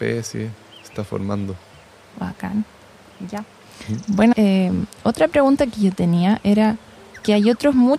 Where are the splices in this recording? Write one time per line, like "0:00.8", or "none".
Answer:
0:04.3